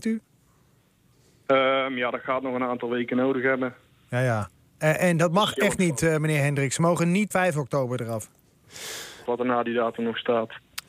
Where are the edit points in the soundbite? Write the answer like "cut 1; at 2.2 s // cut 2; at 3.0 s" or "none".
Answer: cut 1; at 7.3 s // cut 2; at 9.2 s